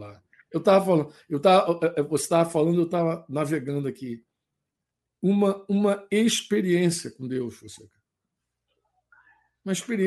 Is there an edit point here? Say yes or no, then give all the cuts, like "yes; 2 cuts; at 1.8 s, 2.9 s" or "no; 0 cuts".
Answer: no; 0 cuts